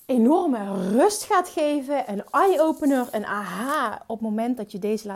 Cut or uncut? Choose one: uncut